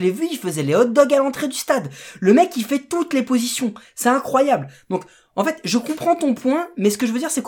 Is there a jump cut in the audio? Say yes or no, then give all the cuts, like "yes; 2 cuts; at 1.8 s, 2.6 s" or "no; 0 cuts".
no; 0 cuts